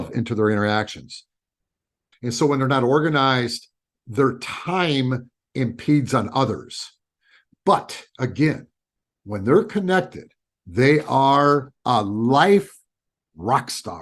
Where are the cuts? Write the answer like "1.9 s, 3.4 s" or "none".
2.1 s, 11.7 s